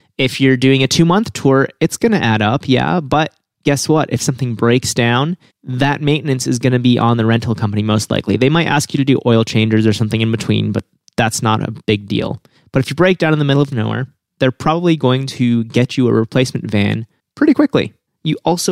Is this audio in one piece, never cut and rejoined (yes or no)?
yes